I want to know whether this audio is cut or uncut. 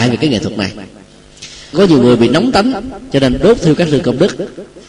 cut